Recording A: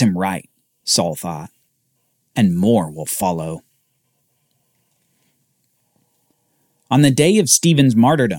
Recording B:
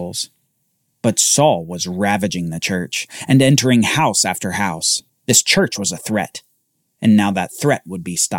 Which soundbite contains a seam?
B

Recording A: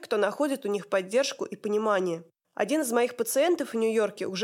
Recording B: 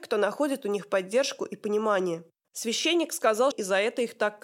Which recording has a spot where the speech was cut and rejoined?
B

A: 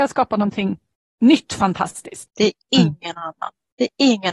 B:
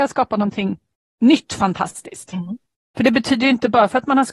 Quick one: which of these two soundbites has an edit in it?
A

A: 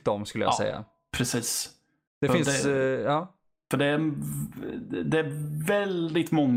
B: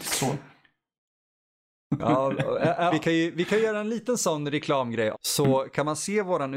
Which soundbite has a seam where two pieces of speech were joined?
B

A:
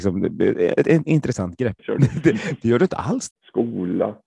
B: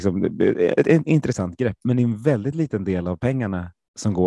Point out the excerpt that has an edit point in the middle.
A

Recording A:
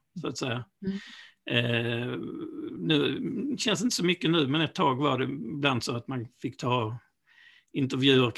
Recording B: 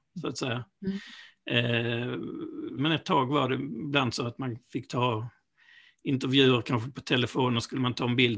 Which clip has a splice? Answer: B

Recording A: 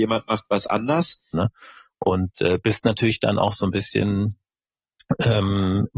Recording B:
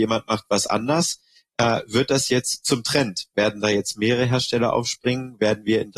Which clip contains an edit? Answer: A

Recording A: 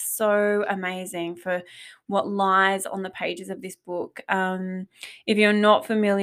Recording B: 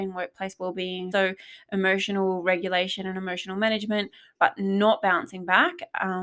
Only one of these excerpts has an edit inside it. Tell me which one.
B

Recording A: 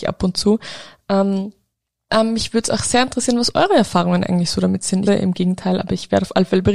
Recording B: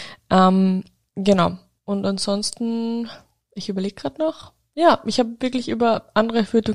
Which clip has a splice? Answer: A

